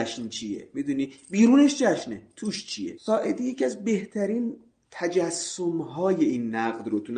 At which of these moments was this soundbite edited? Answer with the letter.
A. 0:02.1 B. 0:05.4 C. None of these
C